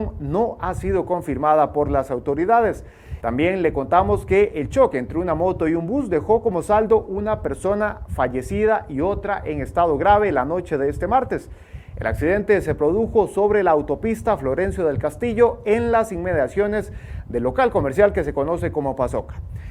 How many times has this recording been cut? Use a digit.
1